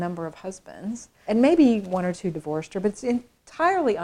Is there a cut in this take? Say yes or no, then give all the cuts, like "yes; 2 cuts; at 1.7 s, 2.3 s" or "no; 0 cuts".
yes; 1 cut; at 1.2 s